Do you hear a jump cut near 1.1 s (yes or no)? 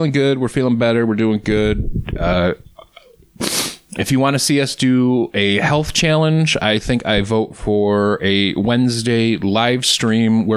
no